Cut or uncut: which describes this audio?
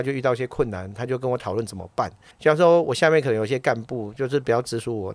cut